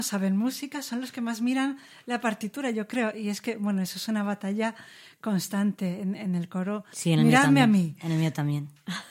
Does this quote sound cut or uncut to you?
cut